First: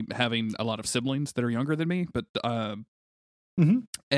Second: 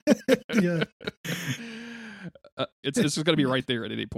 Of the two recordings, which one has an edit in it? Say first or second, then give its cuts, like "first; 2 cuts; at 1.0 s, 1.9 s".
second; 1 cut; at 2.8 s